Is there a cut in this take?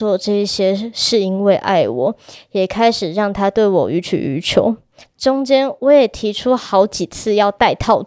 yes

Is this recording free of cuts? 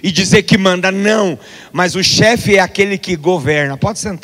yes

